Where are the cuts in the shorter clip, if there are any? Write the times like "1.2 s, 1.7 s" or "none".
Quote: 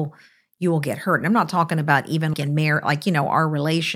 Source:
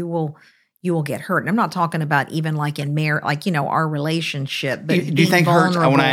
2.3 s